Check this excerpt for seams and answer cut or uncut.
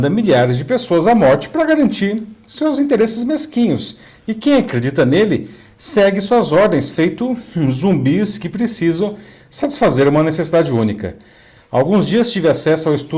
cut